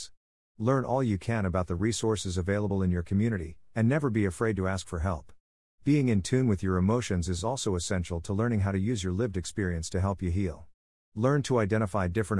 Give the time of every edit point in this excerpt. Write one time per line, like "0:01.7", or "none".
none